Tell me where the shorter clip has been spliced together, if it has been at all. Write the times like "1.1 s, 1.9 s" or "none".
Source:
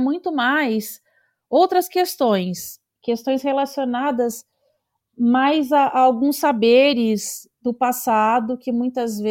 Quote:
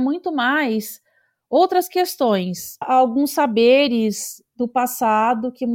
2.8 s